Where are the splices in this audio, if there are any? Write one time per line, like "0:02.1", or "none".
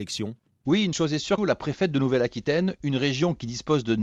0:01.4